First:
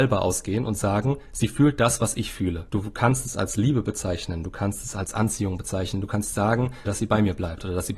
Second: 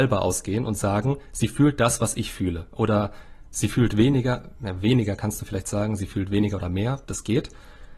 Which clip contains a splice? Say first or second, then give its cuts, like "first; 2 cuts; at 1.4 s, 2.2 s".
first; 2 cuts; at 2.7 s, 6.8 s